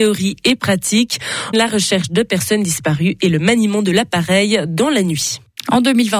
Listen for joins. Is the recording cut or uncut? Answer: cut